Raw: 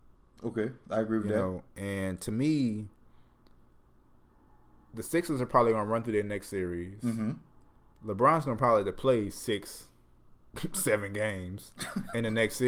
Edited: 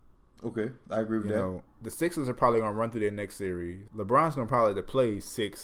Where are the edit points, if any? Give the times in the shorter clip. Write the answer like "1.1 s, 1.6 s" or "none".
1.7 s, 3.9 s